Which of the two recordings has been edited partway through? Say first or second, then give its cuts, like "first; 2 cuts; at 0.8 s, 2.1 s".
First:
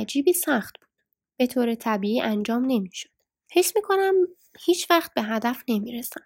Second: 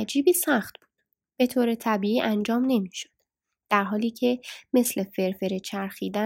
first; 1 cut; at 3.5 s